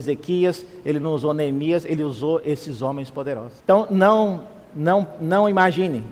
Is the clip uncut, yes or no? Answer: no